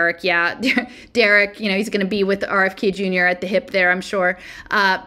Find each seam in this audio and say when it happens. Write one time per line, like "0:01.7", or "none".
none